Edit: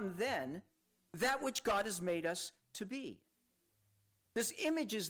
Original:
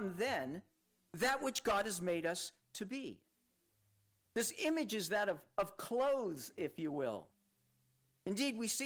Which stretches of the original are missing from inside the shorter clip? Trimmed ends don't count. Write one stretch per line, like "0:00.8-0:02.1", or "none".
none

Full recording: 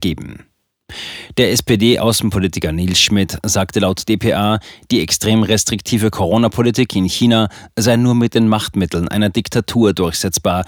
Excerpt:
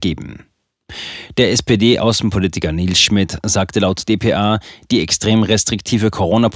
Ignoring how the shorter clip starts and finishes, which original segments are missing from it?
none

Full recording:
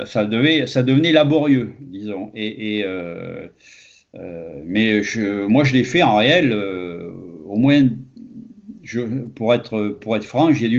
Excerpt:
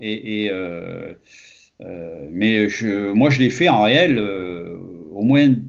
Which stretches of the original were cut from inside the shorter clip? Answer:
none

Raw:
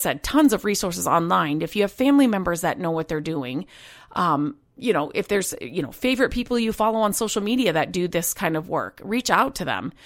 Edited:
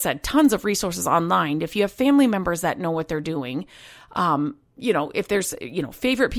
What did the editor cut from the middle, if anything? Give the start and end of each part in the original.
none

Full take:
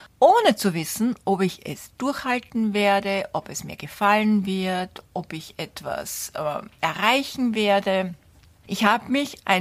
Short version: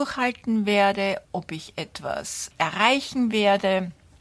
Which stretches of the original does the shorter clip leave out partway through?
0:03.3-0:05.0
0:06.3-0:06.7

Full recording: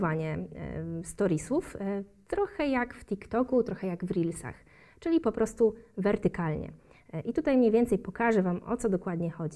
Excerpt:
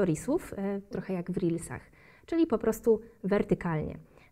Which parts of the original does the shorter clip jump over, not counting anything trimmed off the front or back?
0:02.1-0:03.6

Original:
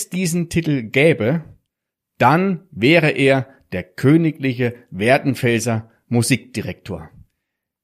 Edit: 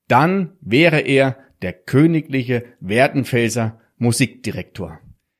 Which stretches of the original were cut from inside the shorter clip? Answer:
none

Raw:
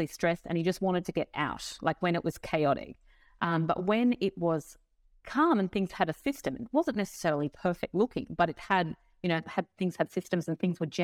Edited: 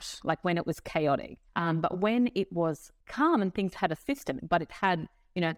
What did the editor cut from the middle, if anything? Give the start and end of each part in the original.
0:03.1-0:03.3
0:04.9-0:05.2
0:06.6-0:08.3

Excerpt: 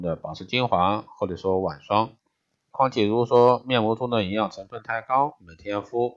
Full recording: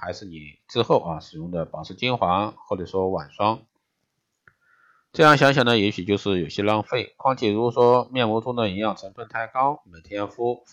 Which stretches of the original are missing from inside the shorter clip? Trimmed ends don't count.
0:04.2-0:07.2

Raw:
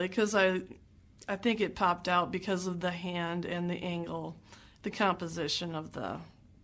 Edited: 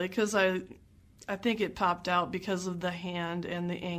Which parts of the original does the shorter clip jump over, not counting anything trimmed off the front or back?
none

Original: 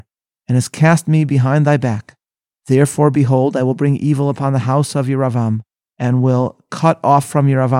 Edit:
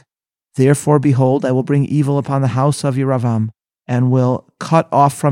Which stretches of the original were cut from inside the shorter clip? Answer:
none

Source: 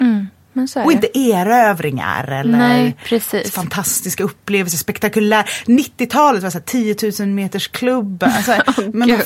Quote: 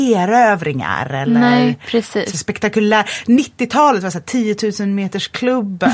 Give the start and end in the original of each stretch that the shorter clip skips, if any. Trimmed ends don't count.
0:03.5-0:04.7

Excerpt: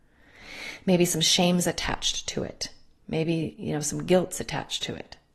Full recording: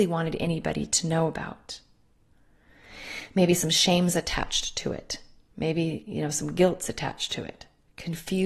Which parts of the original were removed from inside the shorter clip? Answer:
none

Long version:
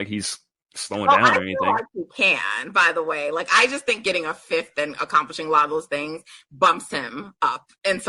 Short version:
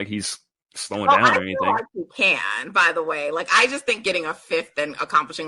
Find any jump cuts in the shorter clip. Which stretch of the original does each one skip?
none

